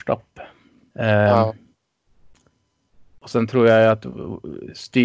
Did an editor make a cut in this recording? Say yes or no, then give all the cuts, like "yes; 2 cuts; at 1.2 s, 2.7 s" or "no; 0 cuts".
yes; 1 cut; at 0.9 s